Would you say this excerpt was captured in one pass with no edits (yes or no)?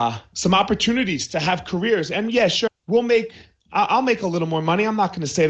no